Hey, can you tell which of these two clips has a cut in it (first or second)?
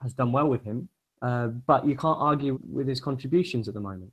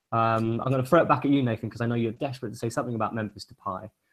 first